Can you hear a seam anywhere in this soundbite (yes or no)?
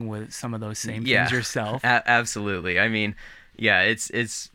no